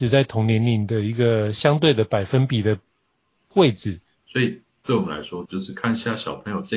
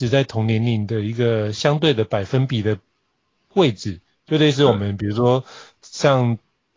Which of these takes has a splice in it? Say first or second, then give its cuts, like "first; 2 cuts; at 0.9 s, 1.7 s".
first; 2 cuts; at 4.2 s, 5.5 s